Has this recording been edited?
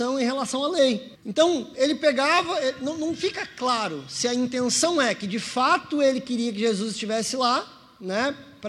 yes; 1 cut; at 1.1 s

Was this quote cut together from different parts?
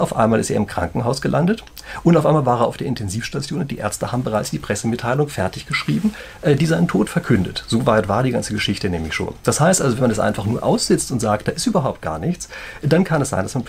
no; 0 cuts

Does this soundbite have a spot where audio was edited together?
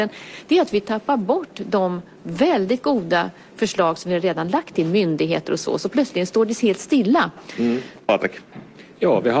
yes; 1 cut; at 8.0 s

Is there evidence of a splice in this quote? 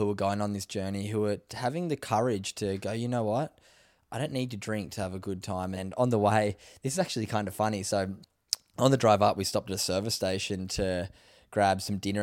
yes; 1 cut; at 5.8 s

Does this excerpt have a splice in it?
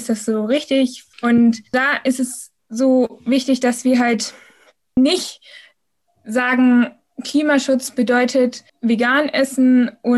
yes; 3 cuts; at 1.1 s, 5.0 s, 8.7 s

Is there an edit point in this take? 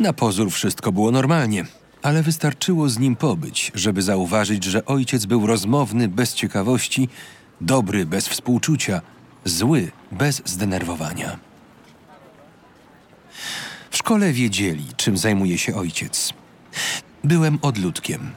yes; 2 cuts; at 13.9 s, 17.0 s

